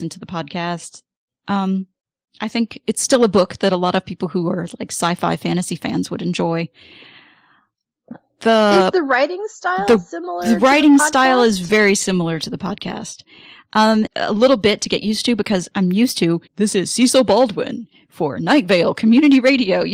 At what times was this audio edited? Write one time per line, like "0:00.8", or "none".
0:14.1
0:16.5